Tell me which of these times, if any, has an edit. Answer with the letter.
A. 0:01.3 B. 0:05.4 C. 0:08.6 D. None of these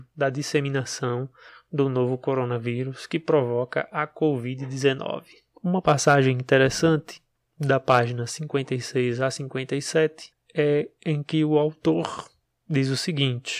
D